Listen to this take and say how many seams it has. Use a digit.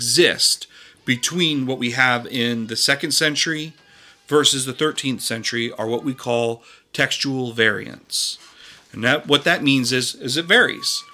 0